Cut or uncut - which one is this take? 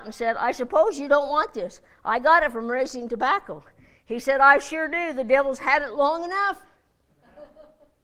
uncut